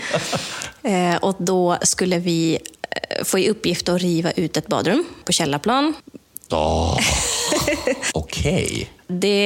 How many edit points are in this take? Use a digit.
2